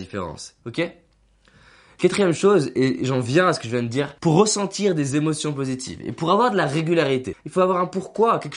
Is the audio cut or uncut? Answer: cut